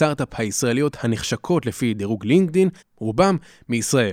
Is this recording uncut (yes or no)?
no